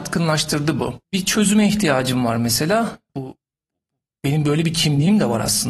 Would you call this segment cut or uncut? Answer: cut